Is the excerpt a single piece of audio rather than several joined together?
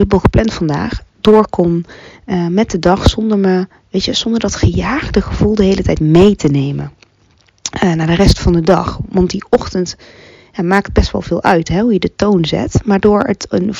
yes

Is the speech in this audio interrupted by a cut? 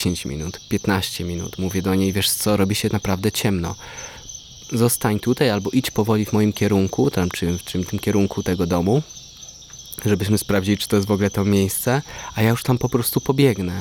no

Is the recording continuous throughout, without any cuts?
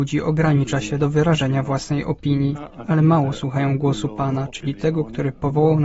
yes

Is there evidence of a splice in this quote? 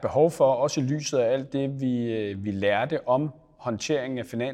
no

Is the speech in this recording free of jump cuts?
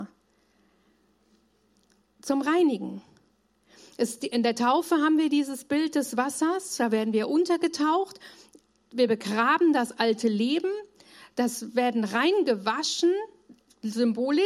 no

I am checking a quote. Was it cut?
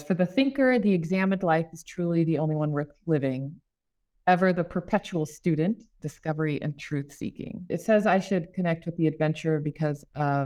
yes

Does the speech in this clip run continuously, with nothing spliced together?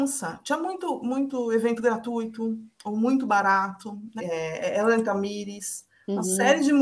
no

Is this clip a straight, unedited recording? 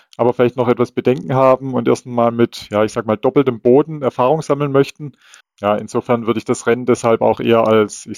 no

